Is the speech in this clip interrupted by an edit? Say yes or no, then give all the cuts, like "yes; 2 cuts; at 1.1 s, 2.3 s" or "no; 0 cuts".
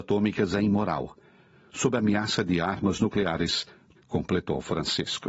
yes; 1 cut; at 4.0 s